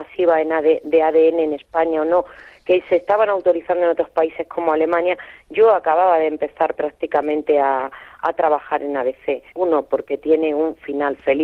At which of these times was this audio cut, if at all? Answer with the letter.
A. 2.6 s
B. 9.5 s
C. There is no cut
B